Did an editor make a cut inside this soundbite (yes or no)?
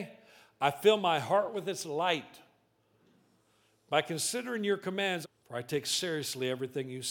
yes